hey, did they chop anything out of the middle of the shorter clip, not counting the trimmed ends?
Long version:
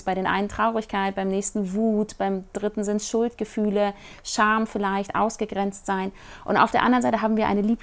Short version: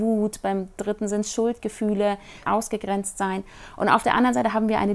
yes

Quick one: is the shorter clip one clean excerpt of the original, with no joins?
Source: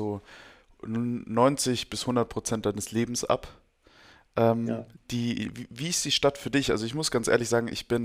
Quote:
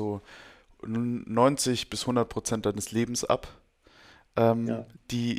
yes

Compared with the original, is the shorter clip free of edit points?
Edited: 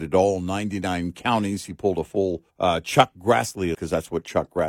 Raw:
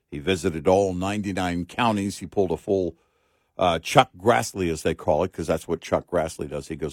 no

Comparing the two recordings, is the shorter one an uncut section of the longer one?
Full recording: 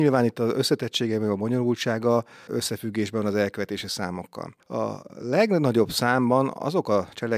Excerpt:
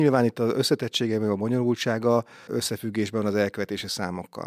yes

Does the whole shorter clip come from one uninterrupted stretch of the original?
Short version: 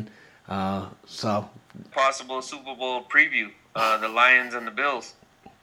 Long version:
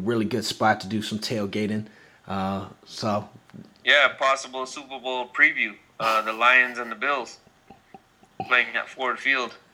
no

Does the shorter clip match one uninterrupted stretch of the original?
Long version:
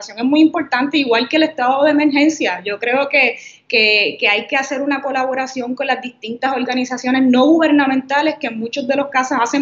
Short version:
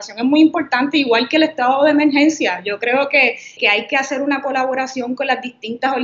no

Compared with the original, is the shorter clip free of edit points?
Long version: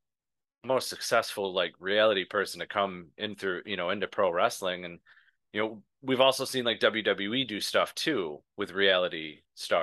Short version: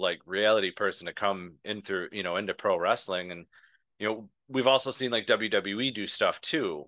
yes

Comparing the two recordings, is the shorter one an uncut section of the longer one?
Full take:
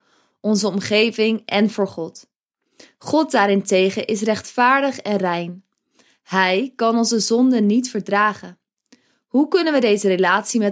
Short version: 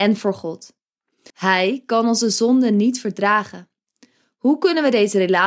no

